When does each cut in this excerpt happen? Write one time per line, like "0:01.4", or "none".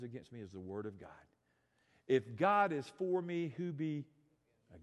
none